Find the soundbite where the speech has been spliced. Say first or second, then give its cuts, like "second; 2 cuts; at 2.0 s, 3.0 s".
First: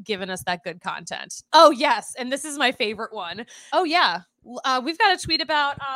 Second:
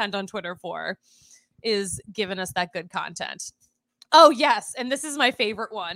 first; 2 cuts; at 1.5 s, 3.7 s